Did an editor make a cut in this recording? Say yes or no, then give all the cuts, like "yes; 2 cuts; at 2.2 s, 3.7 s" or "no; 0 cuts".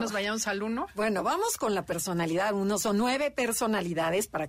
no; 0 cuts